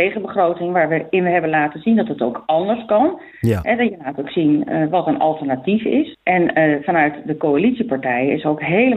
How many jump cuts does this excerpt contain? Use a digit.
2